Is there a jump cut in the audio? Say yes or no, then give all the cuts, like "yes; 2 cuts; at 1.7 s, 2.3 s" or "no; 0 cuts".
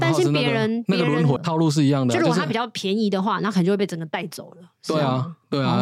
yes; 1 cut; at 1.4 s